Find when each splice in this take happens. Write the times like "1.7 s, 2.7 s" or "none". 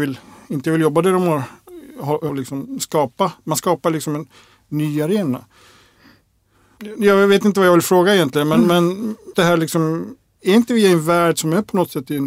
2.3 s, 9.3 s